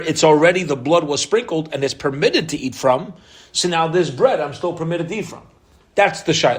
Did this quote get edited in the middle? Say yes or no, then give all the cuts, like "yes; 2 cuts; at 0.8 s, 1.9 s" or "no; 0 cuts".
no; 0 cuts